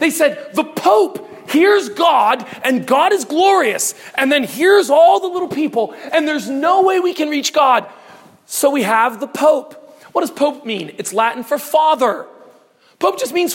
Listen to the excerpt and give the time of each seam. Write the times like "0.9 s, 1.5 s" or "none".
none